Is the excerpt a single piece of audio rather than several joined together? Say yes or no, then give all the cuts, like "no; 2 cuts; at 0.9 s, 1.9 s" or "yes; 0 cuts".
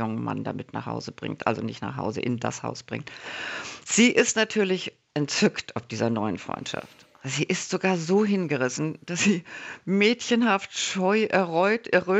yes; 0 cuts